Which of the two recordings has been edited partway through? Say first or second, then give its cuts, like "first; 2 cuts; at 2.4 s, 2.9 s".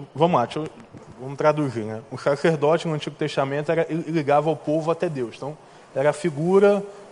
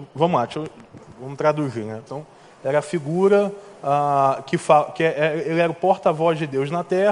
second; 1 cut; at 2.1 s